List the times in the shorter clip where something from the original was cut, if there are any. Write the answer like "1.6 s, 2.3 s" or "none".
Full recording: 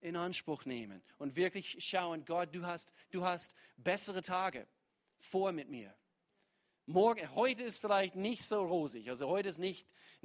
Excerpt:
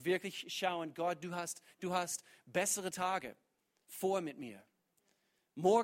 none

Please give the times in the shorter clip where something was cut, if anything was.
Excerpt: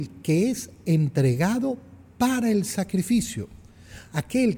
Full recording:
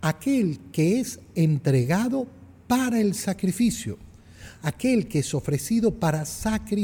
none

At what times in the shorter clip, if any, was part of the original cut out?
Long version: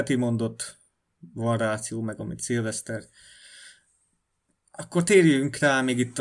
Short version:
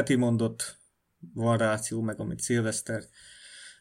none

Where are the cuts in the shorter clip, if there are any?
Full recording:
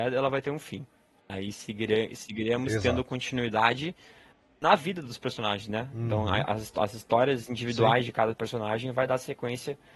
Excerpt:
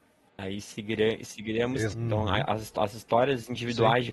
1.9 s

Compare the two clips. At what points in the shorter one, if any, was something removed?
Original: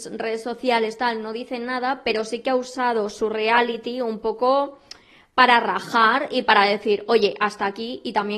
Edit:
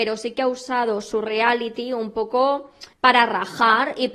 2.9 s

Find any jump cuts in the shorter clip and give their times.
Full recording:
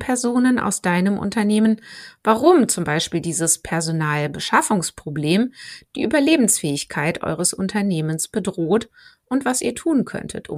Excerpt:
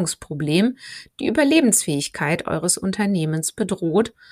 none

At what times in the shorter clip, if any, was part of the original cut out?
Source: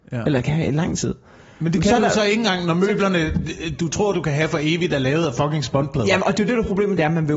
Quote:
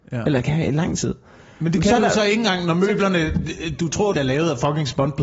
4.1 s

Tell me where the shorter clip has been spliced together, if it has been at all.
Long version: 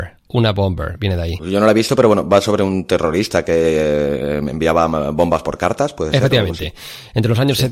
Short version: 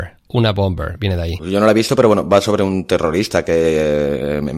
none

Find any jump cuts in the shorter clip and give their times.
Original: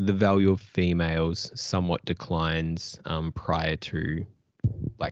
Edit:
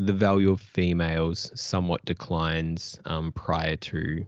none

